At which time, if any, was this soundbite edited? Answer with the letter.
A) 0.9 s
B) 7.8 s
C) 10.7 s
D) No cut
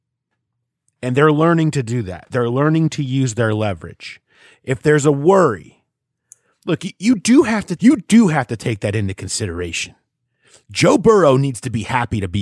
B